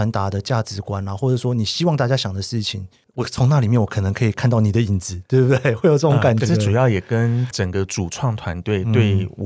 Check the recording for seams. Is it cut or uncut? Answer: cut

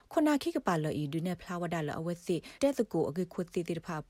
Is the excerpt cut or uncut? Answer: cut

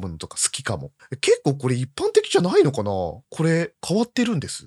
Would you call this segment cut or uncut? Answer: uncut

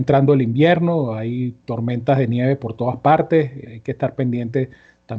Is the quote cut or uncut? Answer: cut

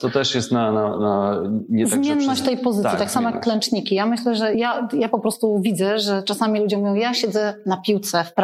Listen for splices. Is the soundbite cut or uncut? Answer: uncut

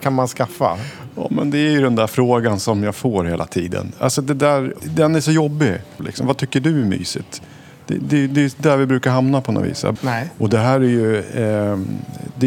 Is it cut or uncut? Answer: cut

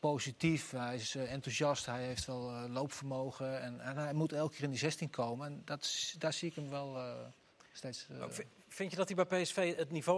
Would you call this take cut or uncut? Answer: uncut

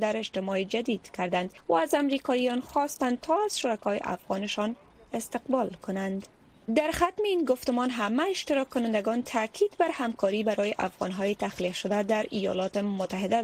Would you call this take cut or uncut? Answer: cut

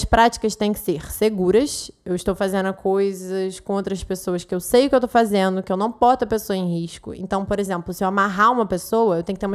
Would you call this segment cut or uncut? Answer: uncut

